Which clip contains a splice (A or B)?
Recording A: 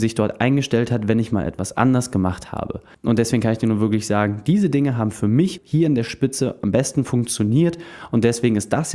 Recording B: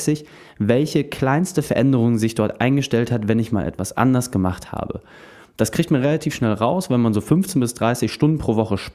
A